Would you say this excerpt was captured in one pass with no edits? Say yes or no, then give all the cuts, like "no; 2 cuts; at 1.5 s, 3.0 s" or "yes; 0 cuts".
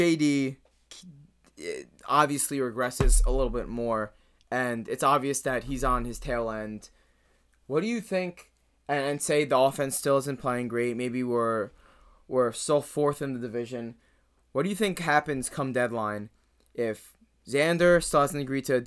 yes; 0 cuts